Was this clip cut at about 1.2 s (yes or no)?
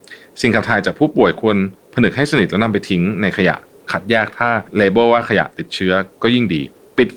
no